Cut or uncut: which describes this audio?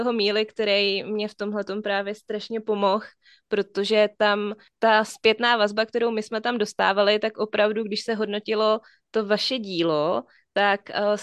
uncut